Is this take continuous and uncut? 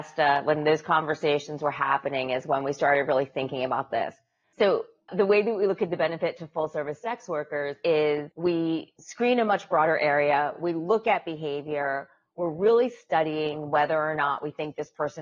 yes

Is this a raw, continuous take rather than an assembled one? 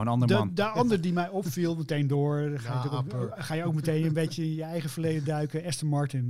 yes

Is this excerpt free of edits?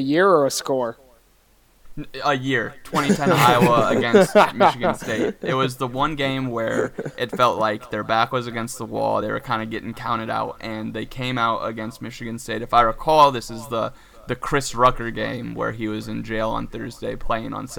yes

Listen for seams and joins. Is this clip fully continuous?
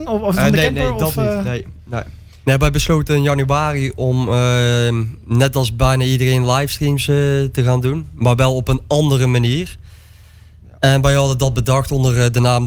yes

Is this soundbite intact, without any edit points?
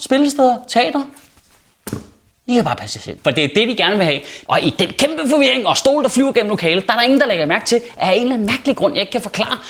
no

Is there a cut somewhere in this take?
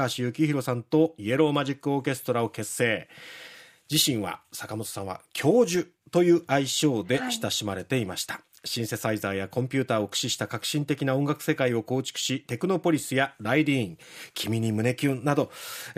no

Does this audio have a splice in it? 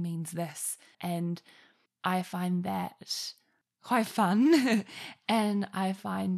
yes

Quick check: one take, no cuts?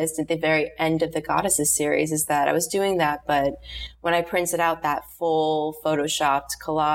yes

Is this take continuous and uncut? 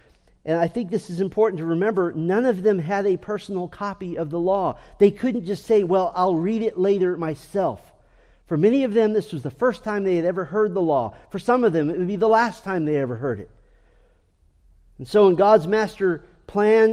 yes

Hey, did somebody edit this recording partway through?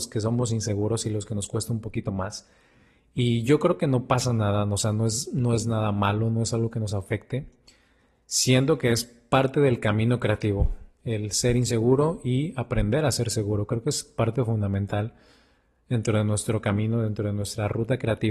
no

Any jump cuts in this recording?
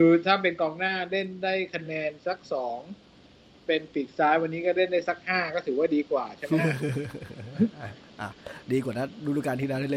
no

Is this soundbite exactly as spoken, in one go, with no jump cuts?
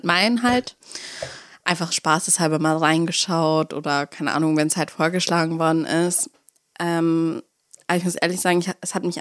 yes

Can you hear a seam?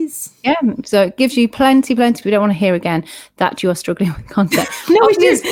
yes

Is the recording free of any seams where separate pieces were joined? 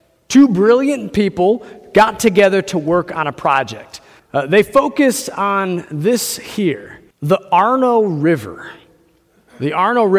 no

